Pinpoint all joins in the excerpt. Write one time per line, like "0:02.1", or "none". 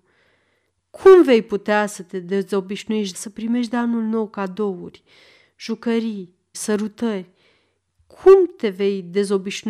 0:03.1
0:06.5